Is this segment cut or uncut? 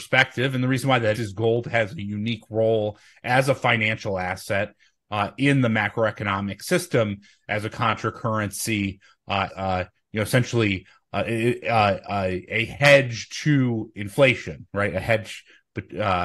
cut